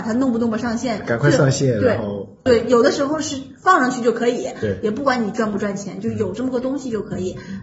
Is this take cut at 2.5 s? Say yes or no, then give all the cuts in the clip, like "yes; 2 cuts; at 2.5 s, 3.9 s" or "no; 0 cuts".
yes; 1 cut; at 2.5 s